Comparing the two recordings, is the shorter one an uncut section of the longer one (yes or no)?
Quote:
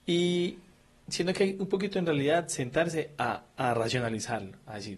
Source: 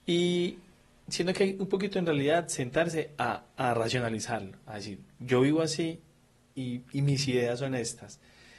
yes